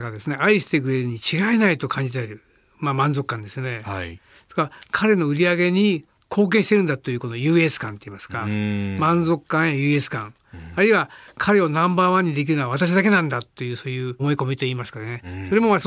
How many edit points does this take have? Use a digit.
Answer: 0